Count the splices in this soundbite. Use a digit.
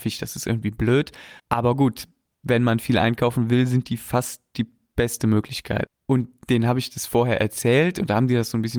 2